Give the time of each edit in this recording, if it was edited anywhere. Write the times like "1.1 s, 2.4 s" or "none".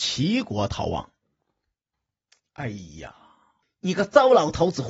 1.9 s, 3.6 s